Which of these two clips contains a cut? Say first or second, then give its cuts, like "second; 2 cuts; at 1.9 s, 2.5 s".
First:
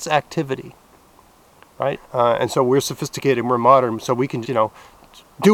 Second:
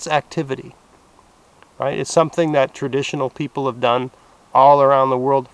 first; 2 cuts; at 1.9 s, 4.4 s